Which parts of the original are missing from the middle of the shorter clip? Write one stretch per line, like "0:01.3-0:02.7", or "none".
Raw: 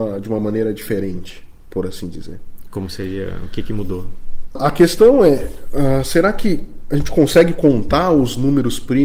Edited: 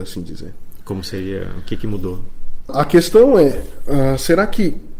none